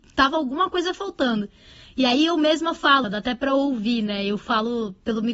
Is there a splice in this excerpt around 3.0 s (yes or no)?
yes